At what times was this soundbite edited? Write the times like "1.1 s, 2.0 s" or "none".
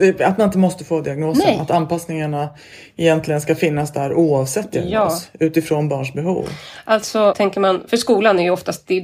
7.3 s

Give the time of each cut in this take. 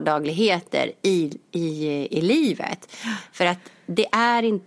2.1 s

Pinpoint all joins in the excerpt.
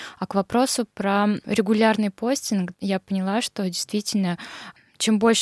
2.7 s

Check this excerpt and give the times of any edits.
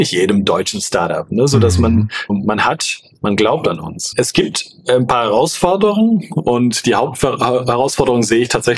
2.3 s, 4.1 s

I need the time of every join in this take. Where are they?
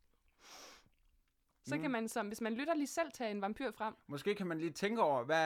1.5 s

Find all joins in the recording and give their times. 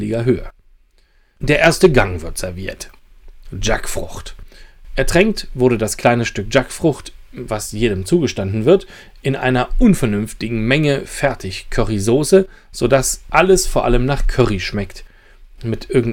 none

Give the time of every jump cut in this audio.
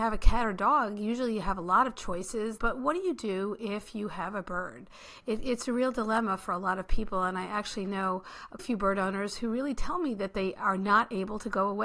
2.6 s, 8.6 s

